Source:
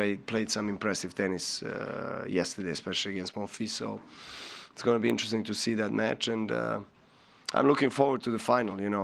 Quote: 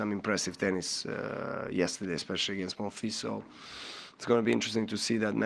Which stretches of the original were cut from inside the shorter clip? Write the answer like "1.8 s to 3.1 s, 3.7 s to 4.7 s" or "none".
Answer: none